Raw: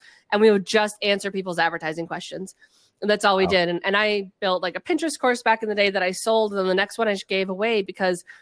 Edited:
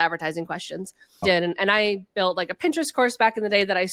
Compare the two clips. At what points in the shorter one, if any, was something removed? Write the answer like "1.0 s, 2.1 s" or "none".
1.2 s